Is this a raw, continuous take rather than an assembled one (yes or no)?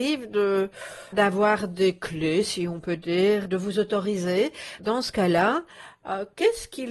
no